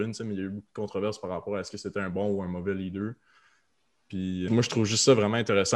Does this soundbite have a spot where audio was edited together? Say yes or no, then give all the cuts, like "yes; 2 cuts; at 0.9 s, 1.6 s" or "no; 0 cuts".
yes; 1 cut; at 4.5 s